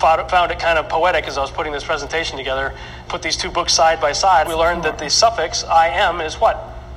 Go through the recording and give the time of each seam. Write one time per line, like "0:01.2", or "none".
0:03.1
0:04.4